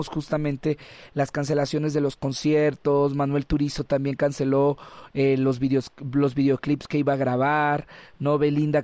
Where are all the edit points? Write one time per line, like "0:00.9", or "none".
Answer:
none